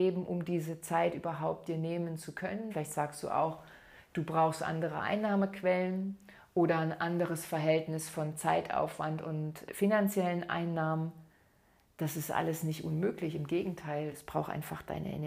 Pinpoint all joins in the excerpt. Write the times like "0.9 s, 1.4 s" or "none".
2.7 s, 9.7 s